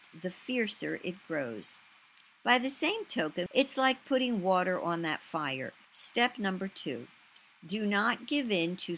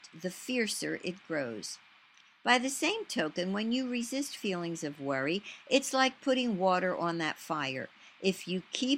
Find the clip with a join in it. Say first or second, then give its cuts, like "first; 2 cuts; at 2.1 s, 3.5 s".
first; 2 cuts; at 3.5 s, 5.8 s